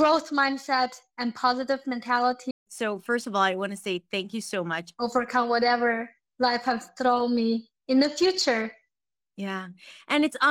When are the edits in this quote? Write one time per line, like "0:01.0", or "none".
0:02.5
0:05.0